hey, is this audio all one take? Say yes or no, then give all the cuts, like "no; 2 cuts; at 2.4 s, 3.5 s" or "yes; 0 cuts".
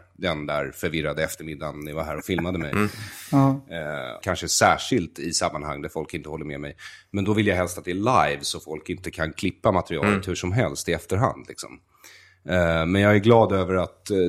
no; 1 cut; at 4.2 s